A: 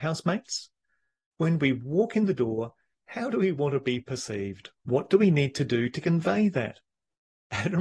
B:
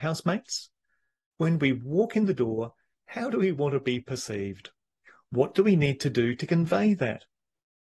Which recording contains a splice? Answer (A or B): A